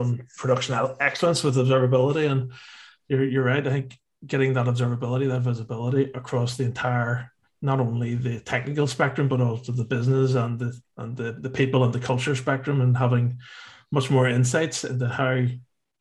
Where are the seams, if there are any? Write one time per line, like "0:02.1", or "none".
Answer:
none